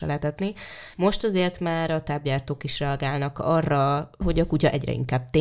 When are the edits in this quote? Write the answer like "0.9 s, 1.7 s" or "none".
0.9 s, 4.2 s

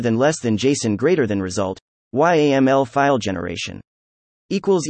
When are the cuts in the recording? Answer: none

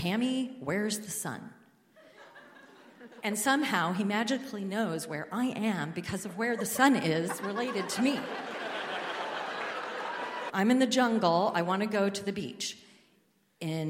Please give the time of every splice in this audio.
10.5 s

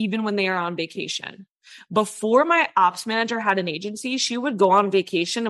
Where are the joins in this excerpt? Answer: none

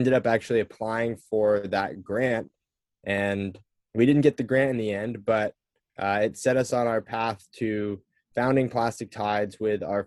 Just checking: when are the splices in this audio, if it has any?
3.9 s

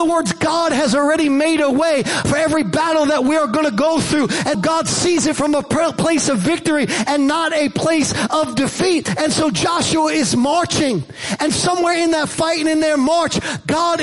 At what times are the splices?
4.5 s

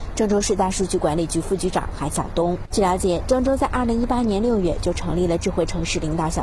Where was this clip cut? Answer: 2.7 s

